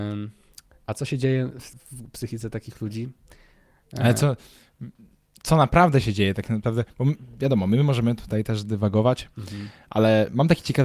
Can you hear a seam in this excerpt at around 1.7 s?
yes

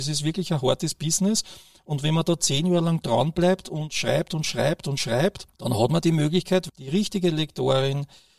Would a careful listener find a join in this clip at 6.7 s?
yes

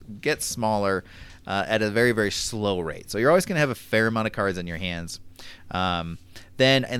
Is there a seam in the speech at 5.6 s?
no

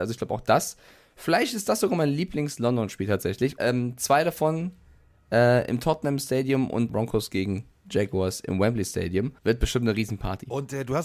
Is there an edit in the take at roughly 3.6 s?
yes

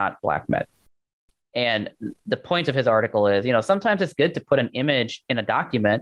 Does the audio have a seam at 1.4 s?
yes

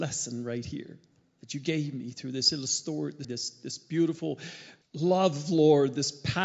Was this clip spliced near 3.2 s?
yes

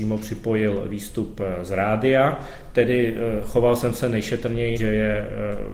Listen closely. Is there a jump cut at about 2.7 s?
no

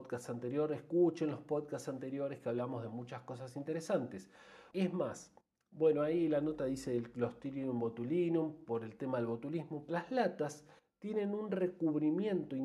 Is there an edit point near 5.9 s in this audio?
no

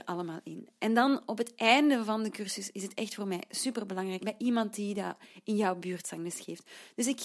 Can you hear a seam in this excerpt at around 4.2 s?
yes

